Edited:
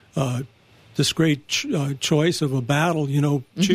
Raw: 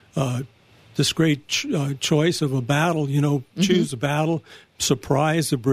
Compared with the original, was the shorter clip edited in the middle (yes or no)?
no